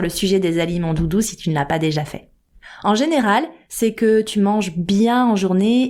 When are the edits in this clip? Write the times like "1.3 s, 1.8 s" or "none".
3.6 s